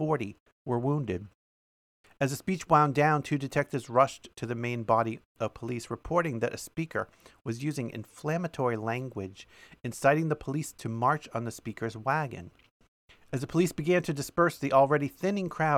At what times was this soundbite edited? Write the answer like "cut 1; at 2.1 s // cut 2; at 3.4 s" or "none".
cut 1; at 2.0 s